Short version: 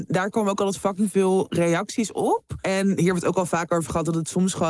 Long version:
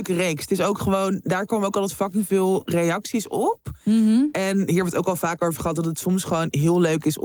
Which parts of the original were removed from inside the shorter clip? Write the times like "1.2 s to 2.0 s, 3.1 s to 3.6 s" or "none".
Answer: 3.8 s to 4.3 s